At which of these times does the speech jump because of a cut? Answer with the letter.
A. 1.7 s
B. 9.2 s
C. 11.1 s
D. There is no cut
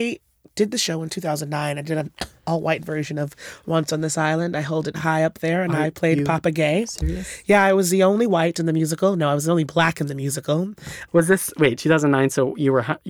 C